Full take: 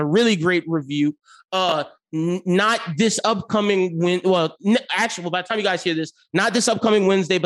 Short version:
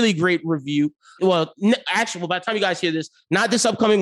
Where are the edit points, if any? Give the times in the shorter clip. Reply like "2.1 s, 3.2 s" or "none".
1.2 s